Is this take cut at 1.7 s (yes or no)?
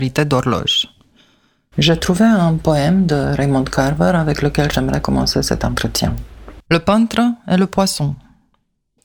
yes